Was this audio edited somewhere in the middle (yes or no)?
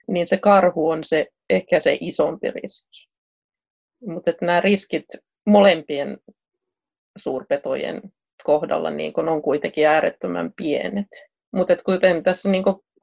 no